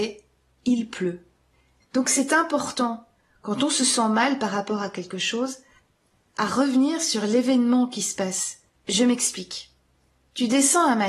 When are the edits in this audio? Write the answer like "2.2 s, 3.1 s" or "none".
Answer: 1.8 s, 8.7 s

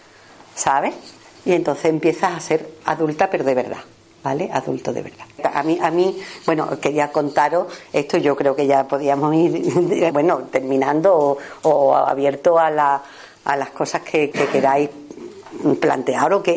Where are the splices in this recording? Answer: 5.4 s, 10.1 s, 14.3 s

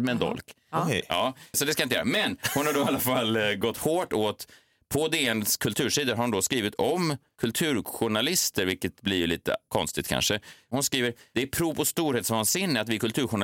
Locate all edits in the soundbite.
1.5 s

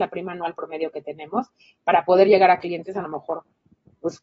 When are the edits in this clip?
none

